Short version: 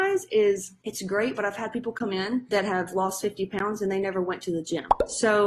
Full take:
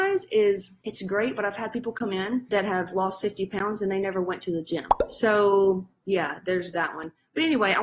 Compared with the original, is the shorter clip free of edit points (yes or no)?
yes